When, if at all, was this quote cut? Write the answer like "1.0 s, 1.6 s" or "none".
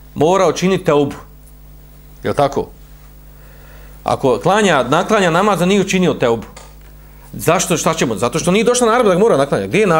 7.2 s